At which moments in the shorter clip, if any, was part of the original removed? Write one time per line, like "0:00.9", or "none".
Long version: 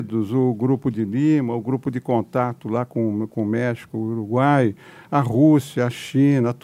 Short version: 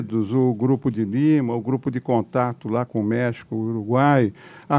0:02.9